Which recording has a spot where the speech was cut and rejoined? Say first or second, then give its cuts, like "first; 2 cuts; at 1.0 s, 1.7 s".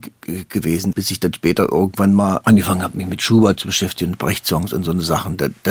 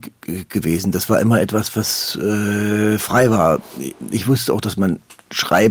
first; 2 cuts; at 0.9 s, 2.4 s